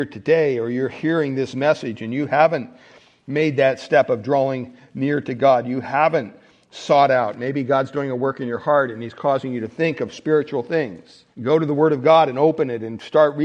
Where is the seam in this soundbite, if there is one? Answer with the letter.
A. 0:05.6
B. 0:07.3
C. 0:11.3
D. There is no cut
C